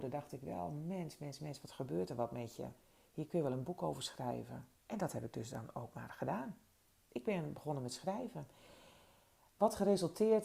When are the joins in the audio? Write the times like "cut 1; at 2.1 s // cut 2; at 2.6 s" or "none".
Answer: cut 1; at 4.7 s